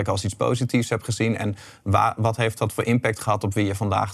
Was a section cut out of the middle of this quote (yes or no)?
no